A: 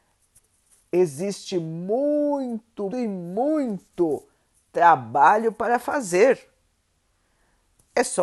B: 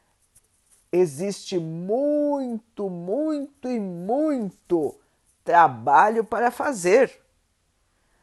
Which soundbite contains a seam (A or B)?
A